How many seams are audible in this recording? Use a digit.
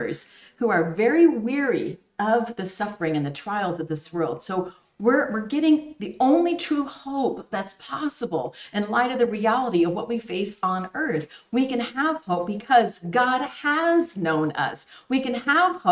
0